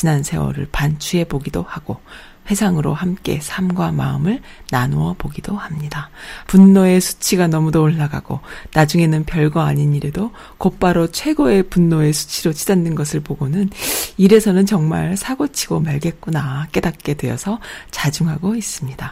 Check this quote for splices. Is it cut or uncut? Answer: cut